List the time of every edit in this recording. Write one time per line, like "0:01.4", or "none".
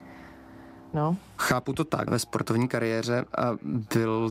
0:00.9
0:02.1